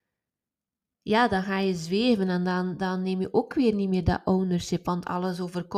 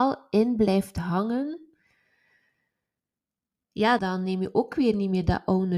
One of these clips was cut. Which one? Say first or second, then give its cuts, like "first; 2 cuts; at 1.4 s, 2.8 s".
second; 1 cut; at 4.0 s